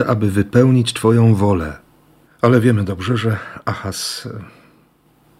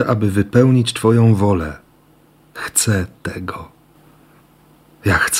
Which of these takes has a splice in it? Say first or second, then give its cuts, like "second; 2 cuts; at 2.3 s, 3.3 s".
first; 1 cut; at 2.3 s